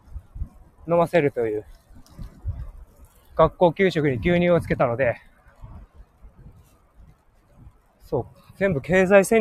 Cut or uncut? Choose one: uncut